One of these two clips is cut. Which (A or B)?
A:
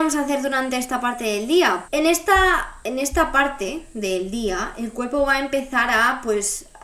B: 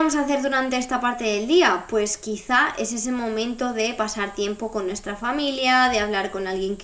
A